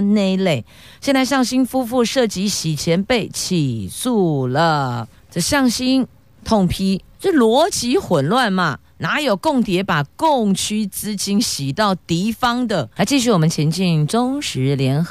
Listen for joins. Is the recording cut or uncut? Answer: cut